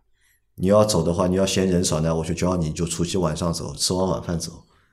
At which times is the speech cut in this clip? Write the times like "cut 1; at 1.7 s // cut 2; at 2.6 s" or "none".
none